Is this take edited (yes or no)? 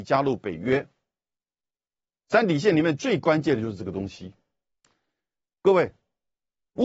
no